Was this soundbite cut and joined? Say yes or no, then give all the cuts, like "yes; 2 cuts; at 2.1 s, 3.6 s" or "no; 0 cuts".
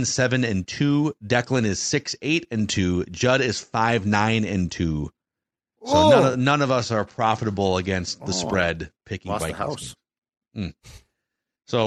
no; 0 cuts